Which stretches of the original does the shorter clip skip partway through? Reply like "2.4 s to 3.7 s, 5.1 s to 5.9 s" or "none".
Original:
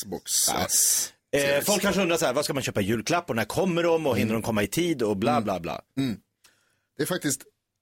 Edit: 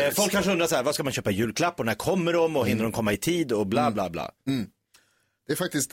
none